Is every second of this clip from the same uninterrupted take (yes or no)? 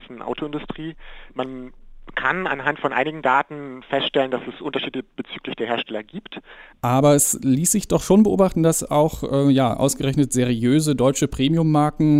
no